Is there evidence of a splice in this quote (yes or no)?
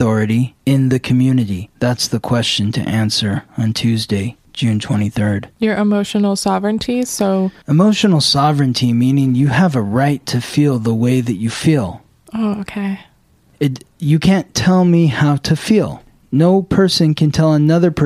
no